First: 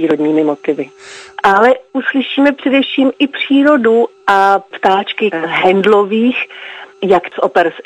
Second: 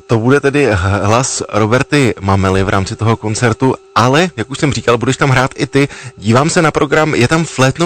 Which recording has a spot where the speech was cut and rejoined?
first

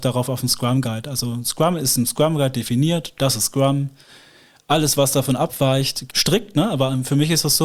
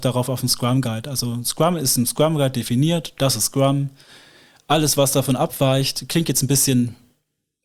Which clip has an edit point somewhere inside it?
first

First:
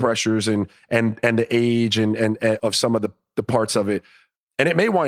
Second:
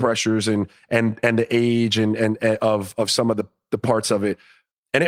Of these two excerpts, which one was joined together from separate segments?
first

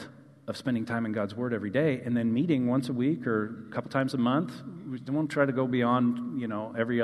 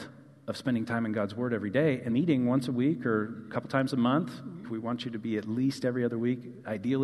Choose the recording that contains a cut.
second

